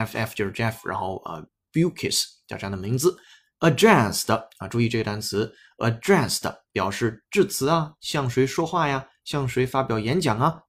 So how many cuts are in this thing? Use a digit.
0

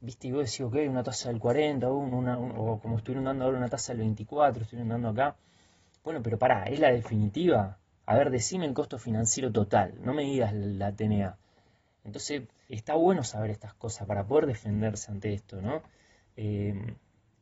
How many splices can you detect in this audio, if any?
1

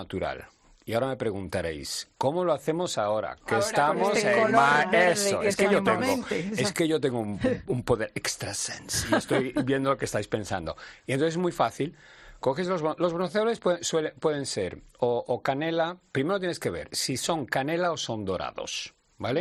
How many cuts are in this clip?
0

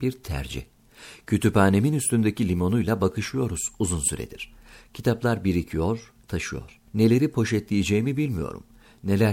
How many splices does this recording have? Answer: 1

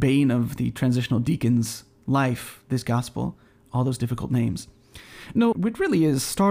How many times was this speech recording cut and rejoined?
1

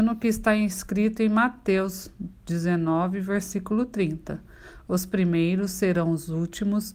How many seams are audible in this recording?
0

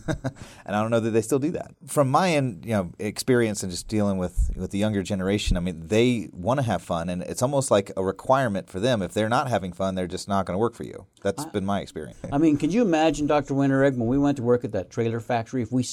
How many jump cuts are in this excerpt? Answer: 1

